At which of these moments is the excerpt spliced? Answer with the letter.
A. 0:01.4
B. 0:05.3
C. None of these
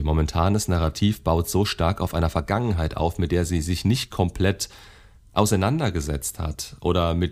C